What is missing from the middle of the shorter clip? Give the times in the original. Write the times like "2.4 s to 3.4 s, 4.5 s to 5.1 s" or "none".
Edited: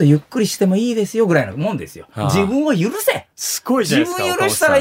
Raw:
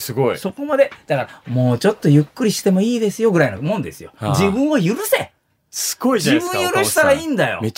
5.4 s to 5.7 s